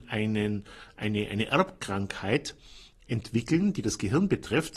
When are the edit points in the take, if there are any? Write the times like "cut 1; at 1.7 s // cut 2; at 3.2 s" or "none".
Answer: none

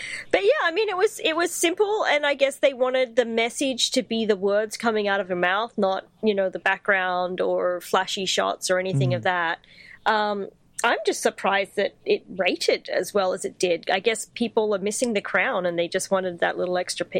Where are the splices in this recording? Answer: none

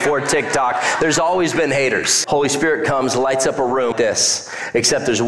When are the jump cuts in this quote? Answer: cut 1; at 2.2 s // cut 2; at 3.9 s

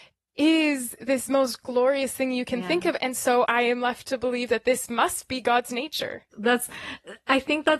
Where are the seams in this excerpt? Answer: cut 1; at 3.4 s // cut 2; at 6.3 s

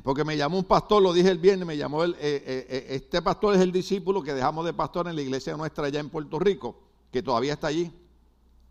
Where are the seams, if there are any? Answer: none

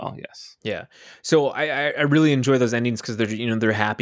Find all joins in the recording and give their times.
none

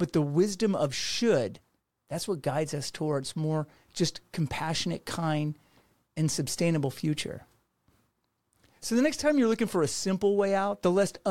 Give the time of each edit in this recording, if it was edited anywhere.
none

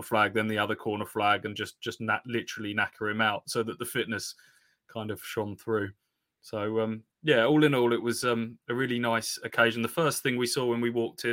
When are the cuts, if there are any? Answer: cut 1; at 7.1 s

